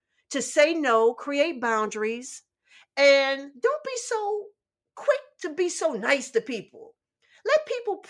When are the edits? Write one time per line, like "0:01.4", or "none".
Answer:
none